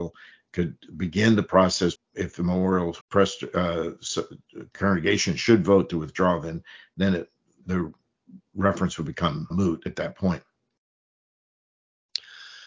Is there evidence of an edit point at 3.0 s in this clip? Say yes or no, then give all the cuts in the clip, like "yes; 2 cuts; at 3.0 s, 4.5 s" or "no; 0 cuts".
yes; 3 cuts; at 2.0 s, 3.0 s, 9.5 s